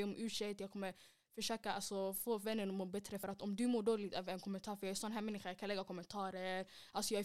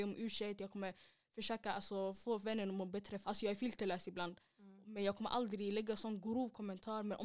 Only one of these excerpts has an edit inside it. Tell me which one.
second; 1 cut; at 3.2 s

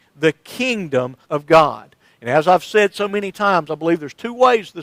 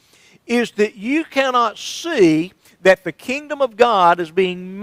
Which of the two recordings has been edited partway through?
first; 1 cut; at 1.2 s

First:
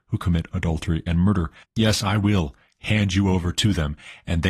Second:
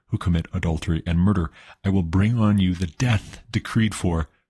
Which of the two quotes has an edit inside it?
first; 1 cut; at 1.6 s

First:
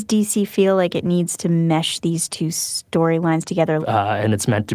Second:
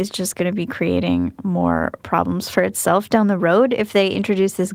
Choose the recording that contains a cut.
first; 1 cut; at 3.8 s

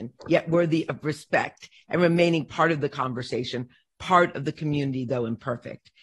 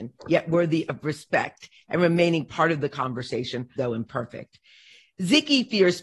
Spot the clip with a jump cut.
second; 1 cut; at 3.8 s

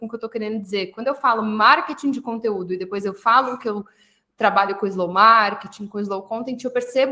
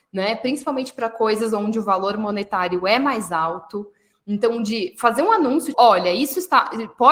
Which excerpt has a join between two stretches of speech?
second; 1 cut; at 5.7 s

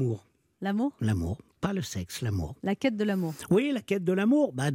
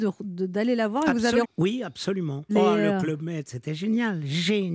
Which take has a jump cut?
second; 2 cuts; at 1.4 s, 2.5 s

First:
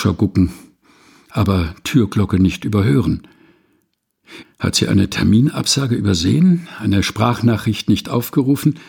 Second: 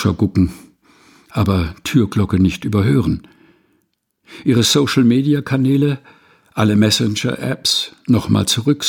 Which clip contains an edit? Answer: first; 1 cut; at 4.4 s

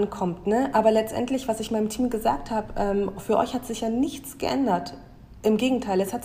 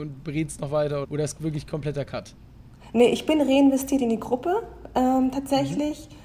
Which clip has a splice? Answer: second; 1 cut; at 1.0 s

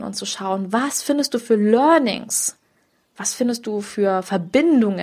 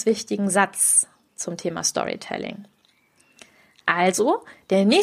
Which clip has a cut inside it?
second; 1 cut; at 3.8 s

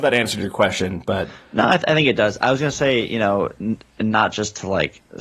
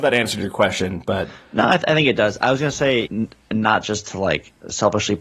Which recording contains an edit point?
second; 1 cut; at 3.1 s

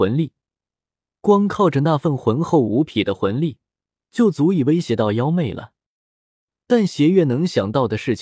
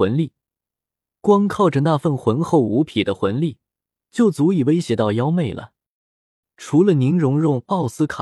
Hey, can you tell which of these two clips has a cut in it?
second; 1 cut; at 6.4 s

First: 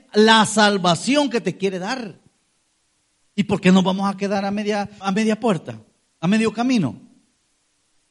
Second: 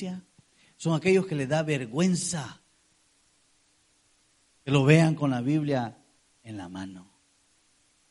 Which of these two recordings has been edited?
first; 1 cut; at 5.0 s

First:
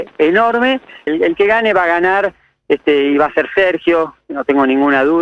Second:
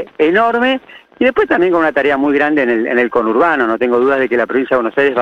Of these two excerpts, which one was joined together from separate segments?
first; 1 cut; at 1.1 s

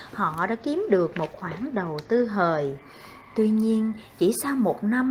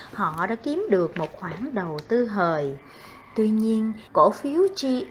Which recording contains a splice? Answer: second; 1 cut; at 4.1 s

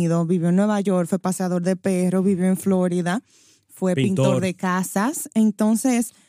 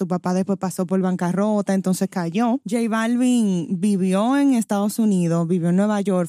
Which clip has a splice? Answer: second; 1 cut; at 2.6 s

